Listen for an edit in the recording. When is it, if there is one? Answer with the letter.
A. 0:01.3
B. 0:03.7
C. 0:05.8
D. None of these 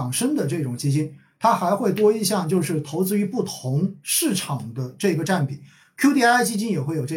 D